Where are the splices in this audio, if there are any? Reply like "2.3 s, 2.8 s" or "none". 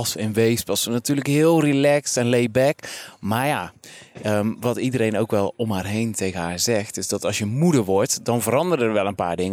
none